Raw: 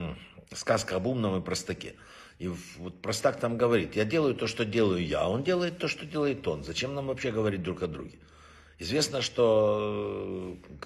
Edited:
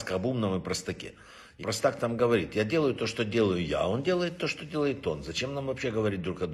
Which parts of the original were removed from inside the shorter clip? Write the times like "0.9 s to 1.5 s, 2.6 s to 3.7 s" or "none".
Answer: 2.4 s to 3.0 s